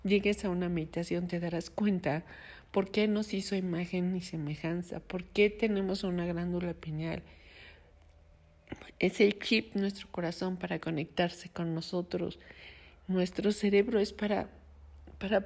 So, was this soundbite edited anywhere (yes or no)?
no